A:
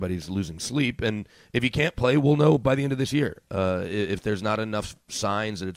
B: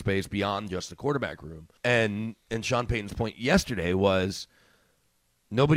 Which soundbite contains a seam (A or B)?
B